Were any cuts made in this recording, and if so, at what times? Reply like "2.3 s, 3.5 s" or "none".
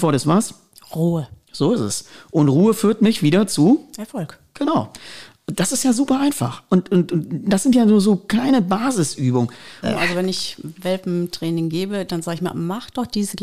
9.8 s

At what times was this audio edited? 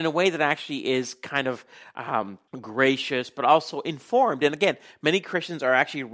2.5 s

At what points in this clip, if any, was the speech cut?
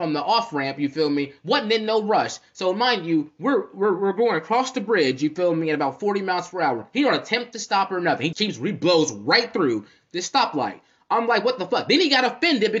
8.3 s

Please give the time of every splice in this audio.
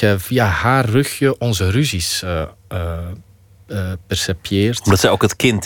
none

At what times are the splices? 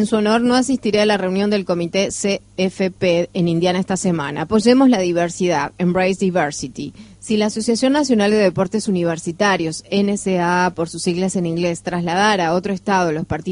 none

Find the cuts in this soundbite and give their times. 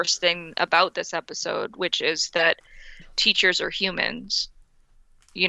none

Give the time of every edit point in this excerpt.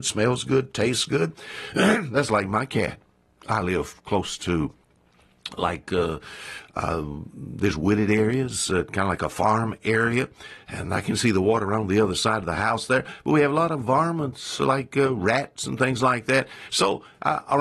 none

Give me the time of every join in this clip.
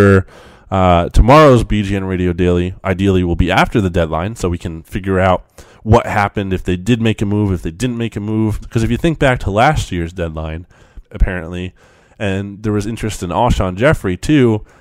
8.6 s, 11.1 s

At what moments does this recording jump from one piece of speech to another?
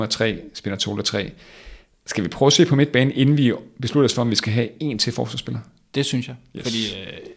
none

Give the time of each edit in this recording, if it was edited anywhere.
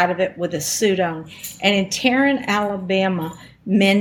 none

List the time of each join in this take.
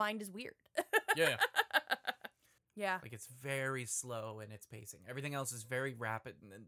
2.6 s

